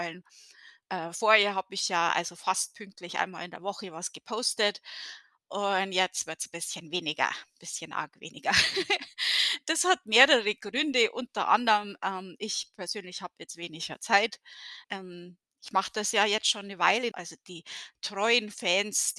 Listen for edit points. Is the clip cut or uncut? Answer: cut